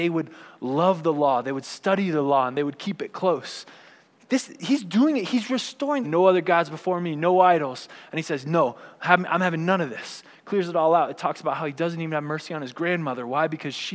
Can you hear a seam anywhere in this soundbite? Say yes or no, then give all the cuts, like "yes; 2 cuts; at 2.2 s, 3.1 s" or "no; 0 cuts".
yes; 2 cuts; at 4.1 s, 6.0 s